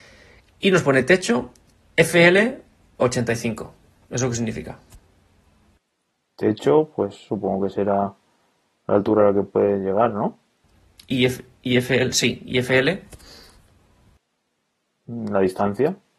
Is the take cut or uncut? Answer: uncut